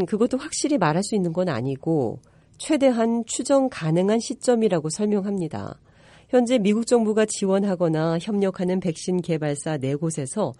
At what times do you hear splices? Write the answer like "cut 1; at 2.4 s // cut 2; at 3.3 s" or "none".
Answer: none

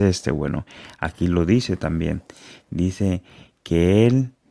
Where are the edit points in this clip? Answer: none

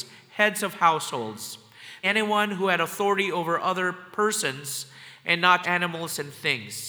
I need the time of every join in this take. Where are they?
cut 1; at 2.0 s // cut 2; at 5.6 s

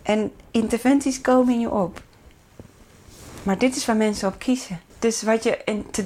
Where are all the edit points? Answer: cut 1; at 4.9 s

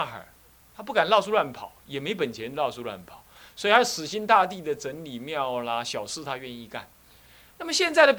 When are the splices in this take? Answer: none

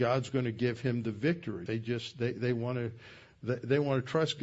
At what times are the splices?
cut 1; at 1.7 s

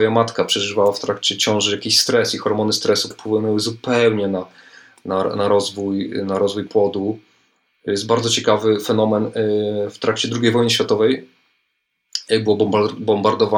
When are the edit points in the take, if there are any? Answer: cut 1; at 3.1 s

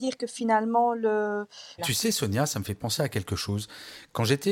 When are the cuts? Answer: cut 1; at 1.8 s

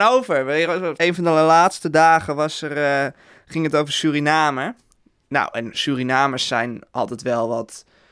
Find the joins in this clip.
cut 1; at 1.0 s

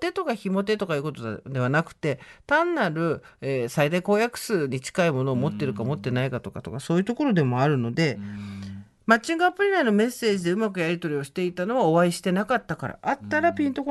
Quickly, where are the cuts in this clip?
none

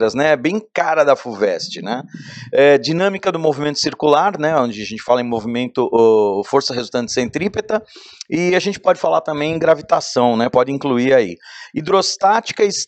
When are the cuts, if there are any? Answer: none

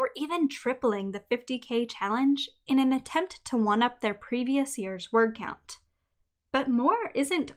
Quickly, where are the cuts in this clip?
none

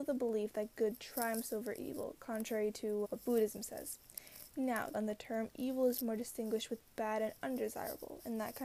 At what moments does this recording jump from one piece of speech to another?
cut 1; at 3.0 s // cut 2; at 4.9 s

